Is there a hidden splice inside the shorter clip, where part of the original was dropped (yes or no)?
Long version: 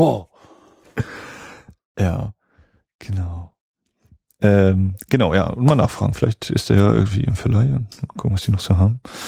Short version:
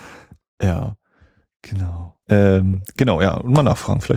yes